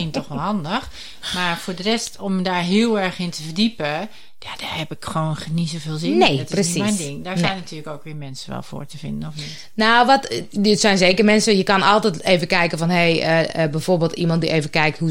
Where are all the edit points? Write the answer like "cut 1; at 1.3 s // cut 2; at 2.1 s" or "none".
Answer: none